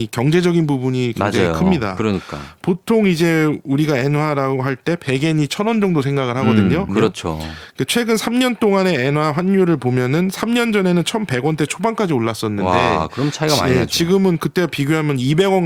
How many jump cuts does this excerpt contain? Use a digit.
2